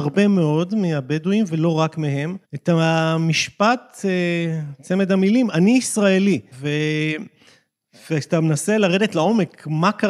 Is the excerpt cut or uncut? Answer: cut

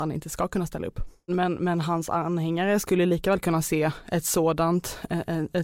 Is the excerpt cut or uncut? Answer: cut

